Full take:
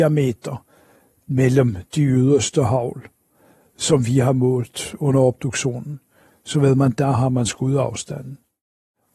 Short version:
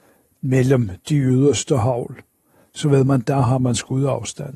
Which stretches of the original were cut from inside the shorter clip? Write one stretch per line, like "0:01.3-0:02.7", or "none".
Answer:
0:03.5-0:06.3